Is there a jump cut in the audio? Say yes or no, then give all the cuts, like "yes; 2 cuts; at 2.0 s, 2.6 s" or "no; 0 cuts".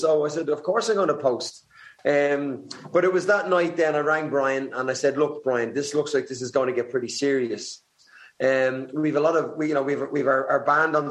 no; 0 cuts